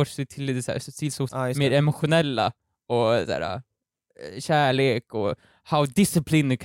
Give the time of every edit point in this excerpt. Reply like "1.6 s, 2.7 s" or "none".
1.3 s